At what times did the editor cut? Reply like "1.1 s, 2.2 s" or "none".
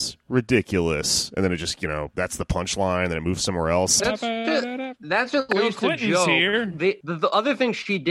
4.0 s, 7.0 s